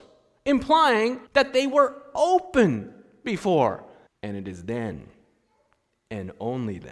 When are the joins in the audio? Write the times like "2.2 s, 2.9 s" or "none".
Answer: 1.3 s, 4.1 s